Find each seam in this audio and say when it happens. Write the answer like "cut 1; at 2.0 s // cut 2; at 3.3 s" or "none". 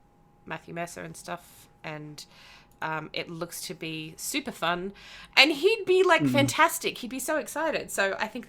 cut 1; at 5.3 s